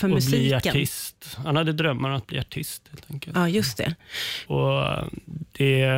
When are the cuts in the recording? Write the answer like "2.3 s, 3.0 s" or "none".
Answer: 4.5 s